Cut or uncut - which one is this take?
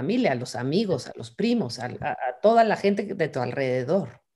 uncut